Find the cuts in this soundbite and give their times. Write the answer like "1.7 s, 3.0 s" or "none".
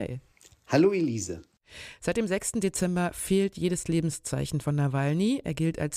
none